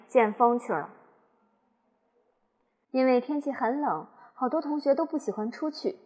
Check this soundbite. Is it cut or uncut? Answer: cut